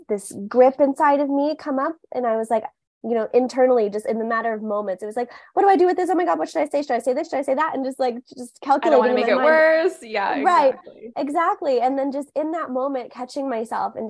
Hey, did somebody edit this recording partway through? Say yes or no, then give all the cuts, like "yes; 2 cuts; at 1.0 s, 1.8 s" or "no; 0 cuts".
no; 0 cuts